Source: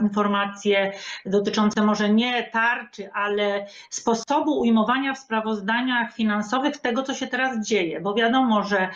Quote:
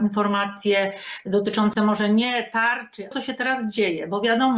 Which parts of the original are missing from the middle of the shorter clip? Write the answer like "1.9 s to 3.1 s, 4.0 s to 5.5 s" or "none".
3.1 s to 7.0 s

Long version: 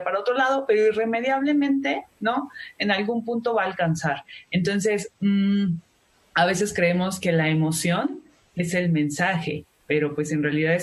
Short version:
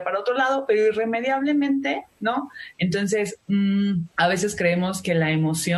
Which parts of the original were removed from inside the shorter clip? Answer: 2.7 s to 4.4 s, 5.8 s to 6.3 s

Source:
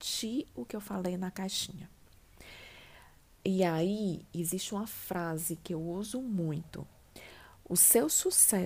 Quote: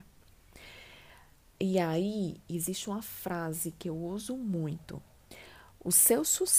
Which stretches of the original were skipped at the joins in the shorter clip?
none

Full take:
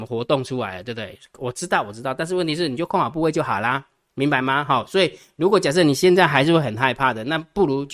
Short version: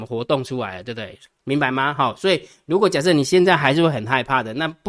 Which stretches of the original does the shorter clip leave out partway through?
1.3 s to 4.0 s

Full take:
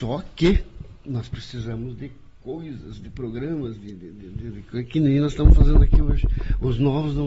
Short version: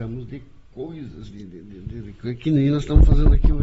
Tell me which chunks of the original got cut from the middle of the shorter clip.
3.0 s to 3.8 s

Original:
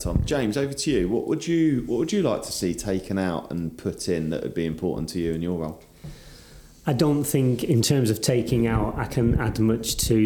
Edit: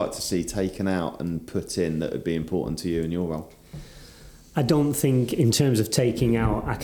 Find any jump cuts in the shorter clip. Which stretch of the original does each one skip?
none

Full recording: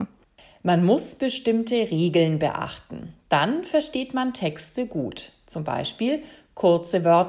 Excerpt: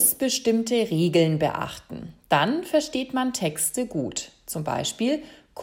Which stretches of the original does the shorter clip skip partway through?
none

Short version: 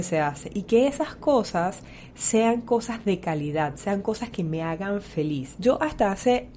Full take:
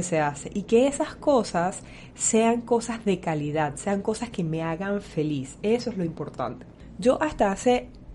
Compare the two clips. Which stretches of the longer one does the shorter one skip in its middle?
5.6 s to 7.0 s

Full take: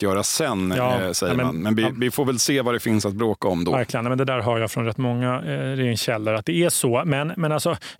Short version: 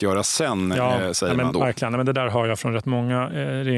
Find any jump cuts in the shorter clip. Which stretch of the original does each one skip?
1.5 s to 3.6 s

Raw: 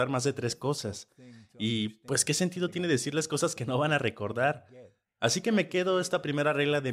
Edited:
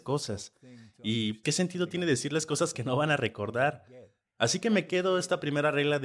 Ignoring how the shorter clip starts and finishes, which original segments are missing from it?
2.0 s to 2.2 s

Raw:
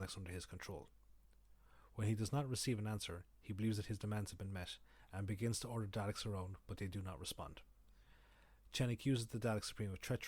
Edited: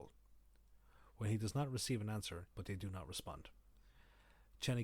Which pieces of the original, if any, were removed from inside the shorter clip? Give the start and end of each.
3.3 s to 6.6 s

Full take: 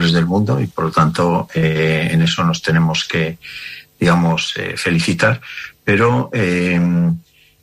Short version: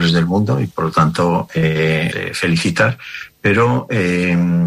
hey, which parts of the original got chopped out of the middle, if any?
2.1 s to 4.5 s

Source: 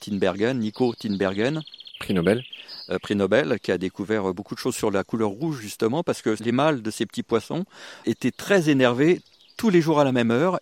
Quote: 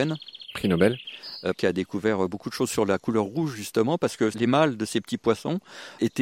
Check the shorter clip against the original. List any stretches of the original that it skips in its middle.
3.0 s to 3.6 s

